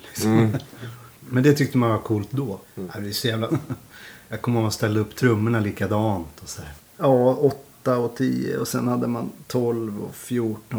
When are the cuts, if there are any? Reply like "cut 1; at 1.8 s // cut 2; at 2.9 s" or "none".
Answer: cut 1; at 1.1 s // cut 2; at 3.5 s // cut 3; at 6.8 s